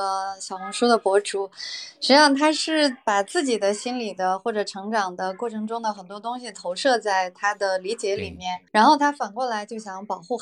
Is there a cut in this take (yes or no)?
yes